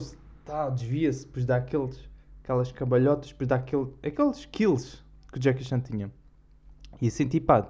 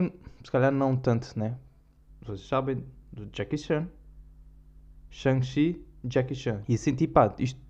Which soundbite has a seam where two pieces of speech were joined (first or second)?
second